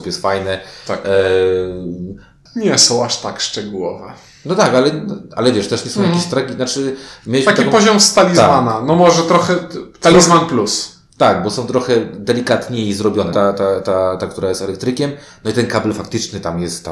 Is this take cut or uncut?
cut